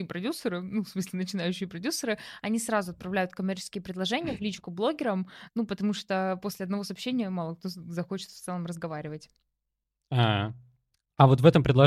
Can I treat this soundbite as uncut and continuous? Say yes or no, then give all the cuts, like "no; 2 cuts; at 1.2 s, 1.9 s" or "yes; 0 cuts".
yes; 0 cuts